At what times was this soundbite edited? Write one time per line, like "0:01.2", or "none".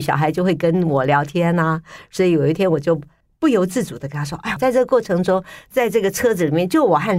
0:04.6